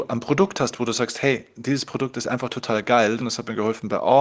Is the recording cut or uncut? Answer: cut